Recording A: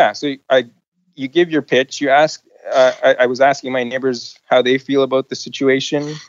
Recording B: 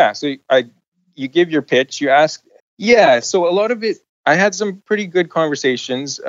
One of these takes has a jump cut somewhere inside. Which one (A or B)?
B